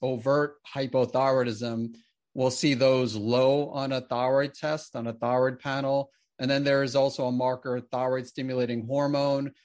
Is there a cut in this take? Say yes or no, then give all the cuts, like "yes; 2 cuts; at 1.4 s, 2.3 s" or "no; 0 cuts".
no; 0 cuts